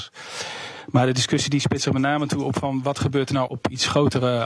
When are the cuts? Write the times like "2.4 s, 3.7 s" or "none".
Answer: 3.5 s